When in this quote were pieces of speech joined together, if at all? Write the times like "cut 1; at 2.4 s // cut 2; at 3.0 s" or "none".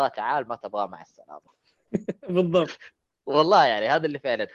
none